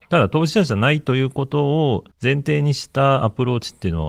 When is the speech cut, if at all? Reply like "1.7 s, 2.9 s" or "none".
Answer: 2.1 s